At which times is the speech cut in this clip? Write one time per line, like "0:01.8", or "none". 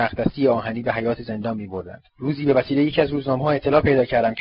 0:02.1